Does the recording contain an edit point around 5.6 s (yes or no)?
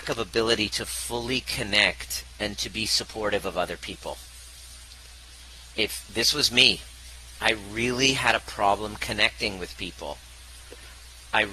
no